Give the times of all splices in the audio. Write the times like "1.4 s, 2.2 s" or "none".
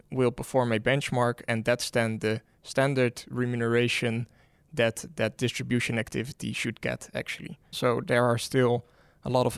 7.7 s